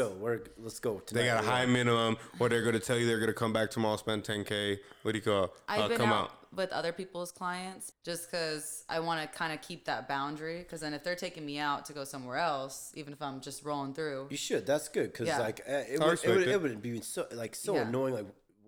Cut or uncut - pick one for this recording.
cut